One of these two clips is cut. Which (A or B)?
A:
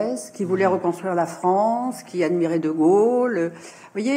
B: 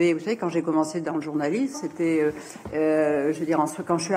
B